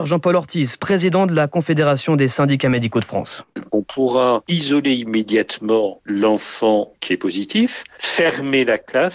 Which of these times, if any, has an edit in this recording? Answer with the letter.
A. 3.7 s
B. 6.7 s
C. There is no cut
C